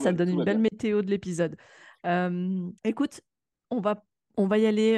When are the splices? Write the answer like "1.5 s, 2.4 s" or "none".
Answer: 2.8 s